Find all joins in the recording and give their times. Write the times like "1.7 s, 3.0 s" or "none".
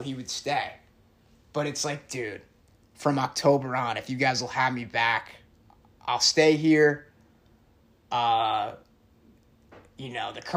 none

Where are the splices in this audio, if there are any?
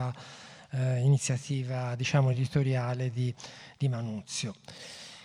none

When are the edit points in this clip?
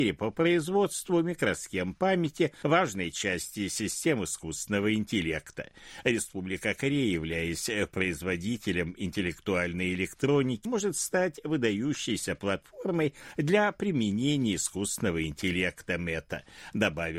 10.7 s

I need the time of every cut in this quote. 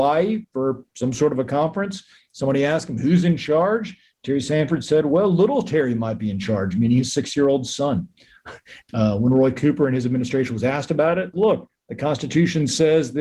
8.8 s, 11.3 s

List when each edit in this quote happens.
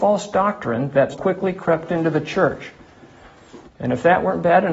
1.1 s, 3.7 s

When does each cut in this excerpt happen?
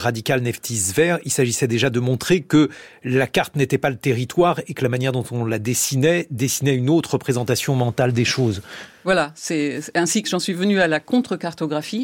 none

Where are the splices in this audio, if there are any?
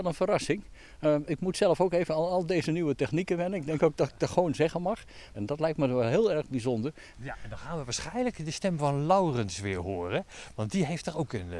5.3 s, 7.1 s

